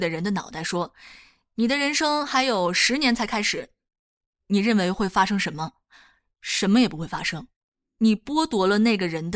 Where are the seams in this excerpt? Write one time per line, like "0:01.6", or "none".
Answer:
none